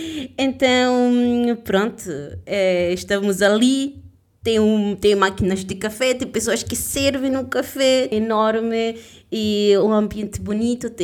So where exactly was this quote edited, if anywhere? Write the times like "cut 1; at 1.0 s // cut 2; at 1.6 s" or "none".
cut 1; at 8.1 s

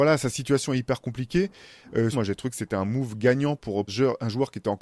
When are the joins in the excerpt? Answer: cut 1; at 2.1 s // cut 2; at 3.9 s

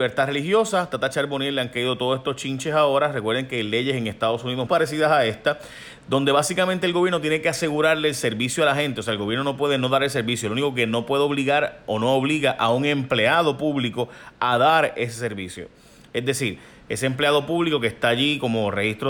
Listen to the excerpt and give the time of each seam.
cut 1; at 4.7 s

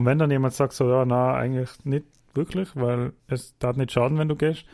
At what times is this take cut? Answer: cut 1; at 3.2 s

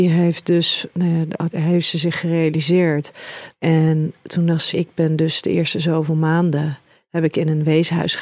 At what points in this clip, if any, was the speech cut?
cut 1; at 1.5 s // cut 2; at 3.5 s // cut 3; at 4.7 s

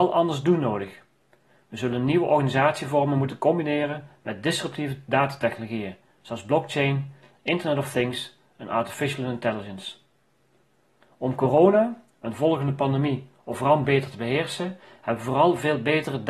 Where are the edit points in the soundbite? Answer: none

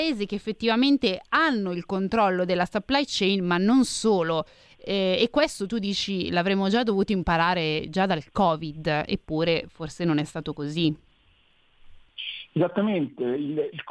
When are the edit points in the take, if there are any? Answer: none

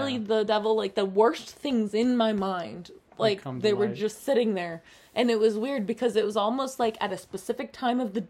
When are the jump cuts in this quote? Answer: none

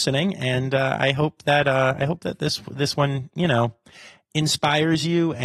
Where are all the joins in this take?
none

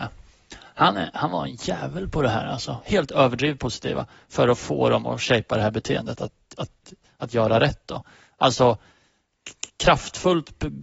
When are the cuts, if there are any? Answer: cut 1; at 2.8 s

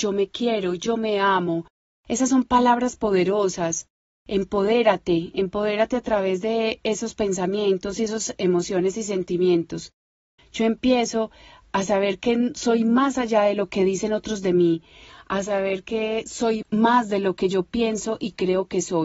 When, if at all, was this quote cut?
cut 1; at 10.4 s // cut 2; at 16.6 s

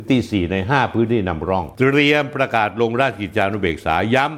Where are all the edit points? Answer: none

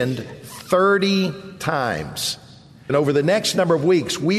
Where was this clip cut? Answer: cut 1; at 2.9 s

